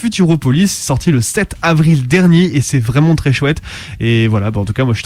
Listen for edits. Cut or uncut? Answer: uncut